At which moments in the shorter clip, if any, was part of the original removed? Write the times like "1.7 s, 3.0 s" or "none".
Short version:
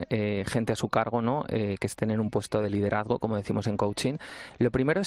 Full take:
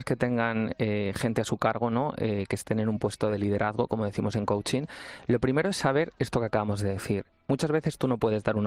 none